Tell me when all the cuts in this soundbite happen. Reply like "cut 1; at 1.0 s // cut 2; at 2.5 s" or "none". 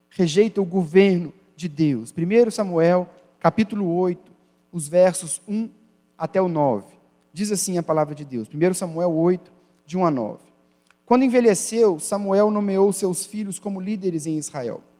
none